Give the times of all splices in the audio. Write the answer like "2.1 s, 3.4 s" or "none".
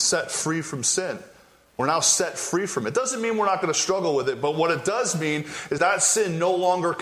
5.8 s